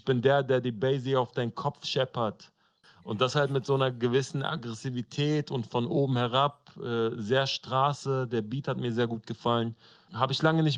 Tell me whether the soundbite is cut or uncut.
cut